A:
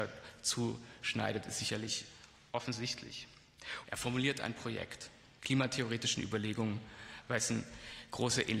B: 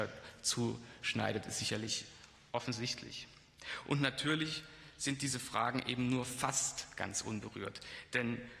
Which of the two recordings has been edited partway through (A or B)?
A